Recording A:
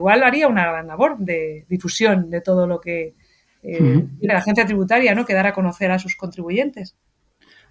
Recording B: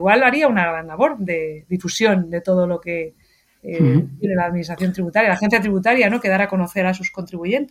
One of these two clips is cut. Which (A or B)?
A